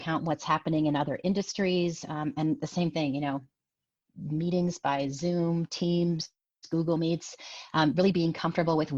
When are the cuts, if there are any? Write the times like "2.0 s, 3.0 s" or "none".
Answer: none